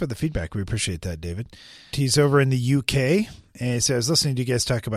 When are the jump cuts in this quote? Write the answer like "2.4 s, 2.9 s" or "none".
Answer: 1.9 s